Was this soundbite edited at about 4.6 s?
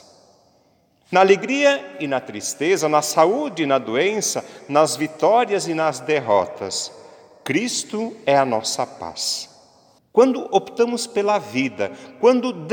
no; 1 cut; at 10.0 s

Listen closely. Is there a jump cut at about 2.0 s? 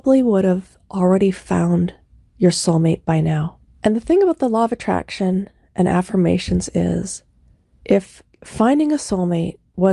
no; 2 cuts; at 3.7 s, 8.3 s

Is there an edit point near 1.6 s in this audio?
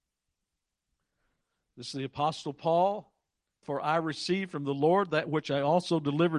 no; 1 cut; at 3.6 s

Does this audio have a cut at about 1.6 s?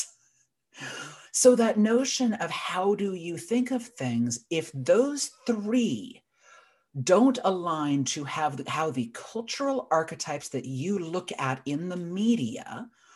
no; 0 cuts

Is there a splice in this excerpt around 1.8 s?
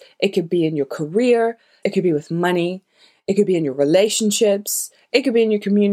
yes; 1 cut; at 1.8 s

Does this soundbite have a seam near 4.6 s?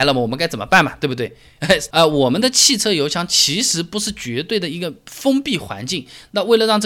no; 1 cut; at 1.9 s

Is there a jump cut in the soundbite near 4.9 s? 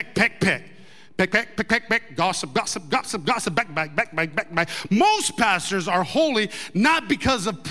no; 1 cut; at 1.6 s

